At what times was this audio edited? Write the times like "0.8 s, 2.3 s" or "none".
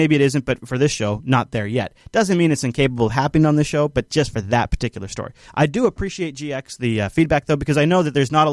none